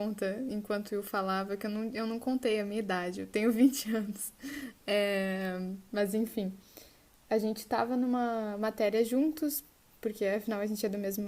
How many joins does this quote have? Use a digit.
0